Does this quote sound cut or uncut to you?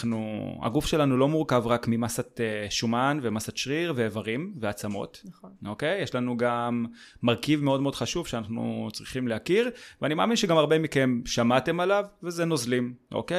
uncut